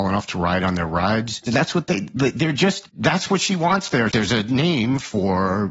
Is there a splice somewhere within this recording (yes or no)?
yes